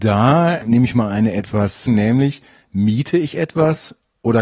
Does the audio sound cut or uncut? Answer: cut